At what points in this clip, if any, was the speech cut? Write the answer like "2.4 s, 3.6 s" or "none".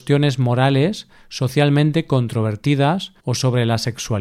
3.2 s